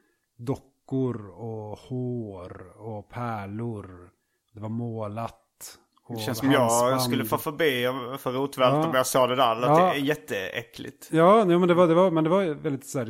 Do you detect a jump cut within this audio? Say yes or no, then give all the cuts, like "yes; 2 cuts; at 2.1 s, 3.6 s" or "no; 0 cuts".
no; 0 cuts